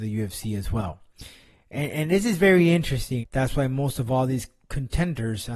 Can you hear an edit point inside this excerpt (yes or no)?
yes